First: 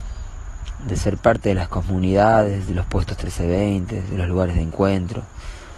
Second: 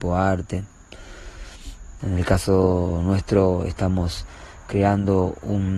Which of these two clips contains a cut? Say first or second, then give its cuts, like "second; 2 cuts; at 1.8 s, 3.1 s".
second; 1 cut; at 2.0 s